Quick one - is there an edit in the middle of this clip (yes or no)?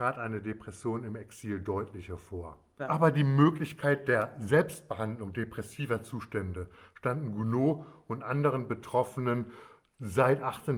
yes